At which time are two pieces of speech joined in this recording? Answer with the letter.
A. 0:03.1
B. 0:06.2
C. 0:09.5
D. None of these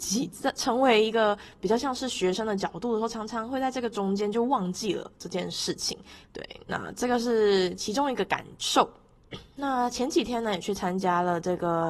B